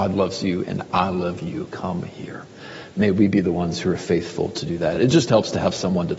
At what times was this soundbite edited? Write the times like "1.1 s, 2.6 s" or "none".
none